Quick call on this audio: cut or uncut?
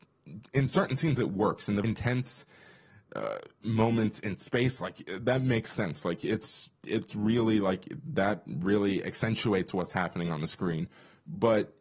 cut